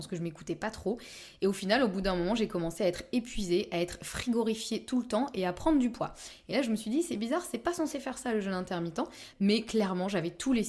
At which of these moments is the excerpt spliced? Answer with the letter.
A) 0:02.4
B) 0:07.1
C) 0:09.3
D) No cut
C